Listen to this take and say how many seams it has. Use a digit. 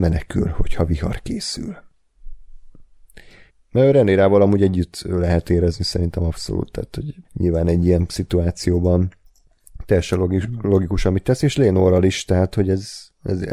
2